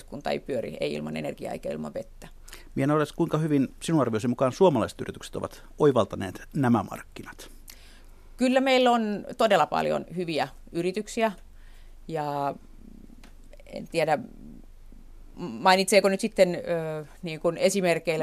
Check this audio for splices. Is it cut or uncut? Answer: cut